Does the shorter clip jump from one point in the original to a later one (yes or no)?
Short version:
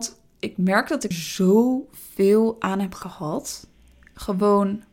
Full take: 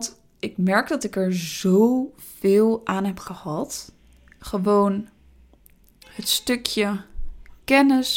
yes